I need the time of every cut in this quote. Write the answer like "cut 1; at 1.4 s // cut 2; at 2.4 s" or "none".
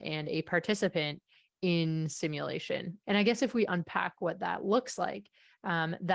cut 1; at 3.0 s